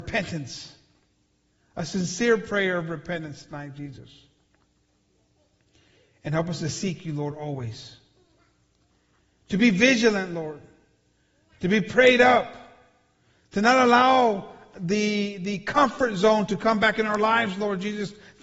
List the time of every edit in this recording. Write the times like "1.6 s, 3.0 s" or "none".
none